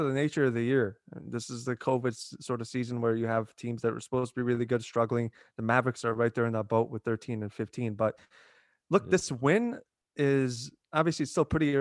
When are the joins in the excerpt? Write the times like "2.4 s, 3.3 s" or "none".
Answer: none